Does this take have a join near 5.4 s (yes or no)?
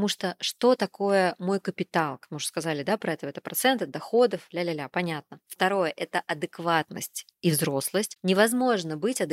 yes